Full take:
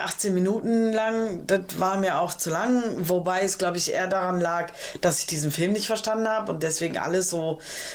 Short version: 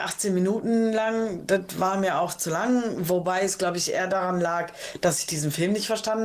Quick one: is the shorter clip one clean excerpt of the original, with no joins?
yes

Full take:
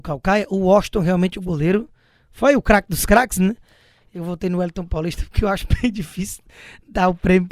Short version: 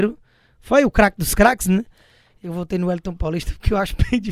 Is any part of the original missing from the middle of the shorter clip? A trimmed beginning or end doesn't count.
no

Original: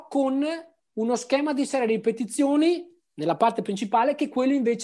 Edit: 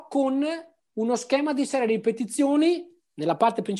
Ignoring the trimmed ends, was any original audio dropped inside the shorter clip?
no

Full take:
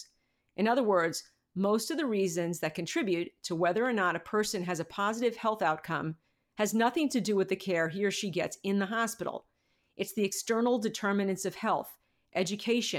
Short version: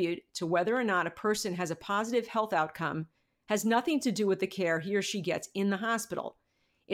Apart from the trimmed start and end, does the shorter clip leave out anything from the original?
no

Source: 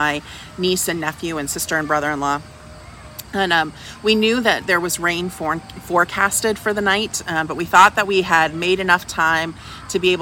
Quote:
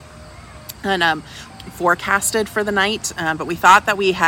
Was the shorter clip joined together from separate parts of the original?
yes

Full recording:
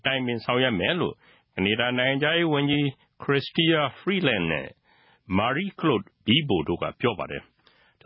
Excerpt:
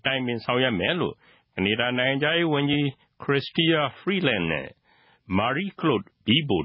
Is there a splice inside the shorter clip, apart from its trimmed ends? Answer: no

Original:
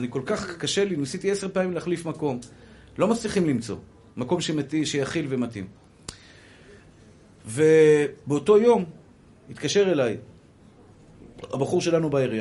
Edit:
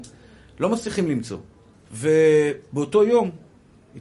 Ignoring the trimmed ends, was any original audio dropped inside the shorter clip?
yes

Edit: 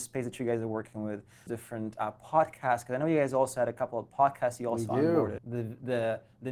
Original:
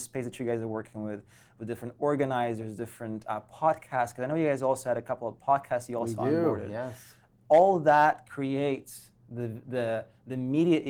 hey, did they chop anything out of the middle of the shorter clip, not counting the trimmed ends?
yes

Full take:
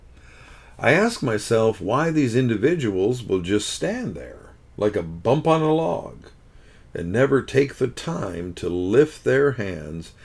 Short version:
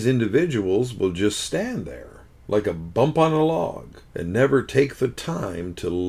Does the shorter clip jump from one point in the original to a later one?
yes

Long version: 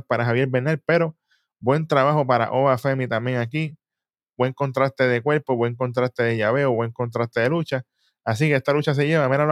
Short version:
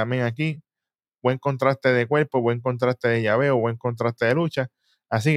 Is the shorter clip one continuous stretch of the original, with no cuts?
yes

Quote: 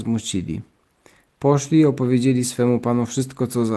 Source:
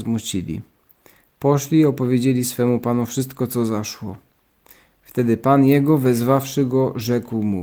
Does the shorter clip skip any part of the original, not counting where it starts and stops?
no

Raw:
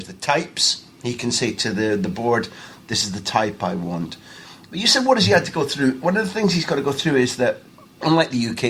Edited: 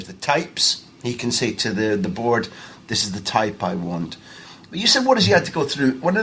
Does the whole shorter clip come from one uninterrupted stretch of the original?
yes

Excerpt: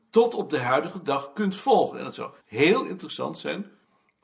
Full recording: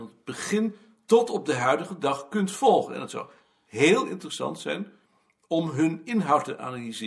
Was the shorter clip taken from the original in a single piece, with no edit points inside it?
no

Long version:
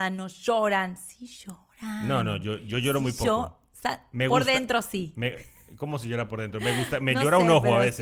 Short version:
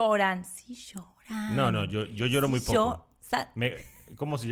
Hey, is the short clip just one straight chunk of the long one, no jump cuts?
no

